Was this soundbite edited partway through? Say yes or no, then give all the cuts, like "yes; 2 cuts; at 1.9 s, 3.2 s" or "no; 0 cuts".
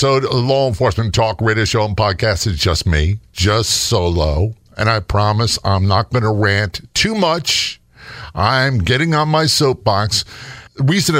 no; 0 cuts